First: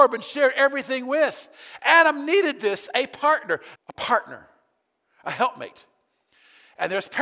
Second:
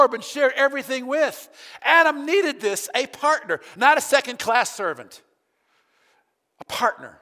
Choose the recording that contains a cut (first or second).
first